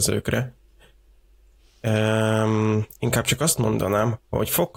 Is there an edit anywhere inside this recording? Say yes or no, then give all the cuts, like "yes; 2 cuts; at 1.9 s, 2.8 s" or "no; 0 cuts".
no; 0 cuts